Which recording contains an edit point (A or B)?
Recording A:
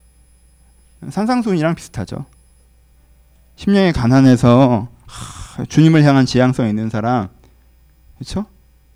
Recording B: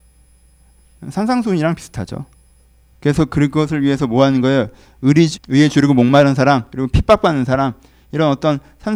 B